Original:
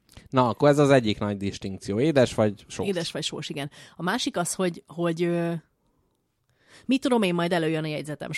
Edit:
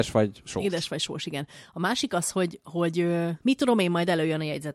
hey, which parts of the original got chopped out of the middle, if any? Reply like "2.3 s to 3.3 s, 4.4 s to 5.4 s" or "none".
5.6 s to 6.8 s